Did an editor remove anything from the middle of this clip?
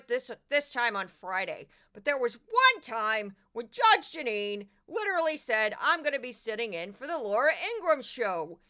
no; 0 cuts

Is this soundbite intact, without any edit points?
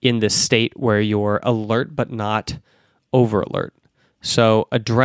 yes; 0 cuts

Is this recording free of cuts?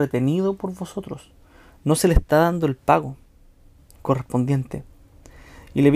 yes; 0 cuts

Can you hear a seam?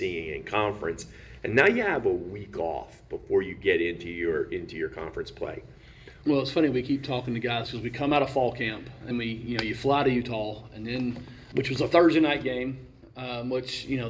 yes; 3 cuts; at 6.2 s, 9.1 s, 11.5 s

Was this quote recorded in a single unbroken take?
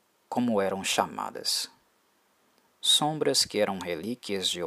no; 1 cut; at 2.7 s

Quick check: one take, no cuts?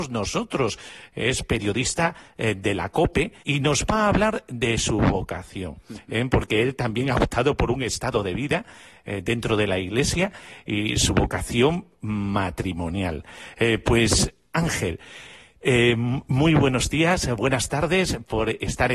no; 1 cut; at 3.4 s

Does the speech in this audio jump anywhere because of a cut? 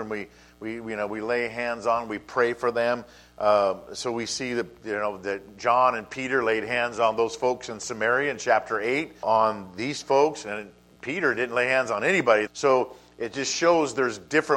yes; 2 cuts; at 9.2 s, 12.5 s

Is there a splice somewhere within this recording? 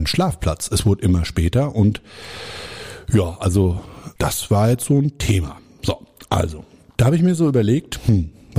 no; 0 cuts

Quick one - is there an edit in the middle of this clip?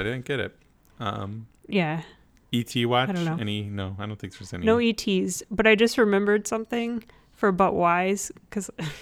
no; 0 cuts

